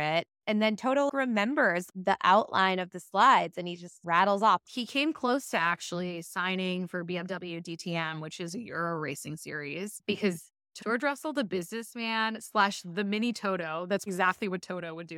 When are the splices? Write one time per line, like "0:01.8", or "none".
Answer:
0:04.7
0:10.8
0:14.1

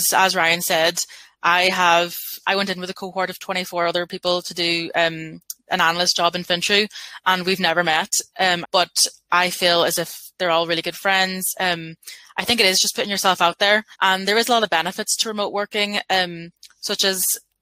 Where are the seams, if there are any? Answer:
0:08.6
0:13.9

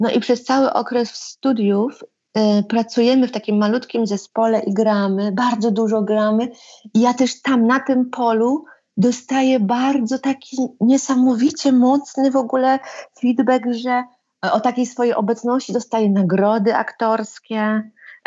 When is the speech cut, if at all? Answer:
none

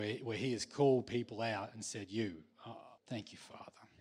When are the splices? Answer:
0:03.0

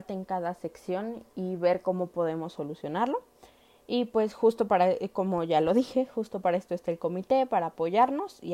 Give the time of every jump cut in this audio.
none

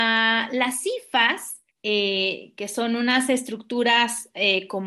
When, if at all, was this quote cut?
0:01.7

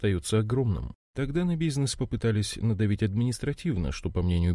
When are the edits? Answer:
0:01.1

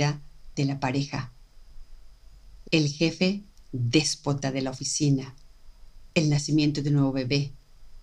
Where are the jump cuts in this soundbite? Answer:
0:02.6

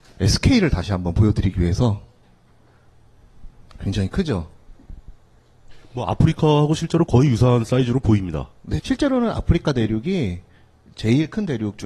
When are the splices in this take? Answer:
0:08.8

